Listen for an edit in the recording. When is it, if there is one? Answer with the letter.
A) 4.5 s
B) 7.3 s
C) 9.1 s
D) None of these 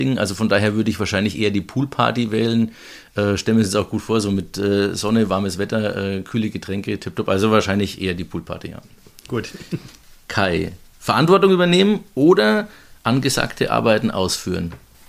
D